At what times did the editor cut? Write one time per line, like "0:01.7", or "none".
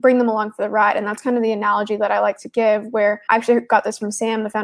0:03.3